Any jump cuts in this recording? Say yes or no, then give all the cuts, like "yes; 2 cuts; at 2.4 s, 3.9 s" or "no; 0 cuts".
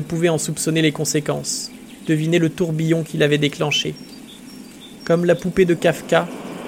no; 0 cuts